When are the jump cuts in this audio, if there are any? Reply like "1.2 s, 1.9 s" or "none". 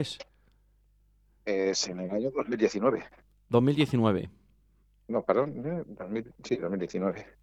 none